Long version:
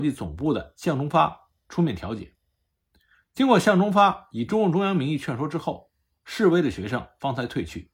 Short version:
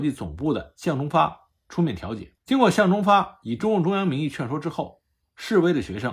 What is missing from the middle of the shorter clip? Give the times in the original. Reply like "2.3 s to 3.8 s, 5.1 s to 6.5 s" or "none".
2.4 s to 3.3 s